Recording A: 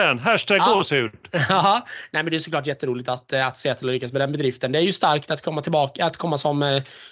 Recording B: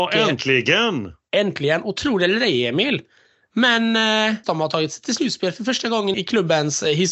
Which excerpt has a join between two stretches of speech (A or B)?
B